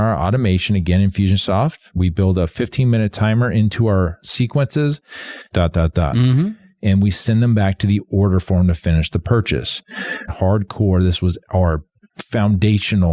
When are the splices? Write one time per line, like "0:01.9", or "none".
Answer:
0:05.5
0:10.3